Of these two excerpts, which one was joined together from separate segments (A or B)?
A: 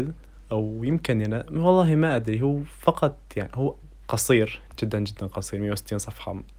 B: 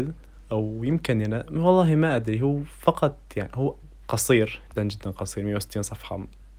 B